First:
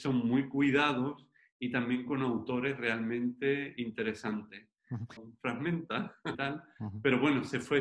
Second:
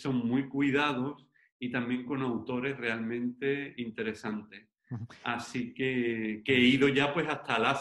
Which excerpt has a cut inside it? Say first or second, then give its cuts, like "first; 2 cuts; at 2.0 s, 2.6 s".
first; 2 cuts; at 5.2 s, 6.3 s